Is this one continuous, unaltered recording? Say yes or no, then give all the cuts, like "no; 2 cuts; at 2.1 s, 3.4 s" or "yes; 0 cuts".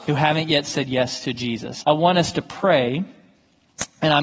no; 1 cut; at 1.8 s